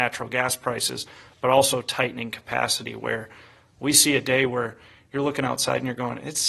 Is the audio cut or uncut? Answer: uncut